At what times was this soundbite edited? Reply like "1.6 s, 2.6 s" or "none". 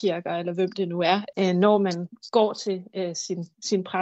1.3 s